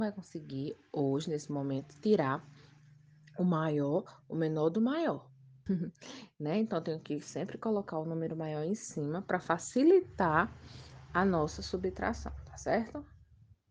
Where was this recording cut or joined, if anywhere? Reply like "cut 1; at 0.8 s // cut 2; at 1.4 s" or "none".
cut 1; at 5.7 s